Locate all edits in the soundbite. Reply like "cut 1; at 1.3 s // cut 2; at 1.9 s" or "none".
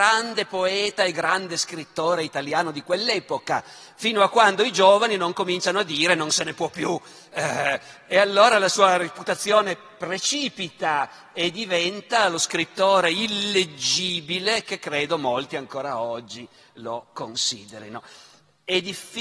none